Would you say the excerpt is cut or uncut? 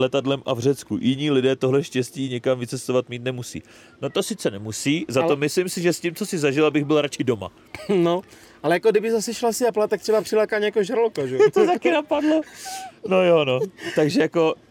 uncut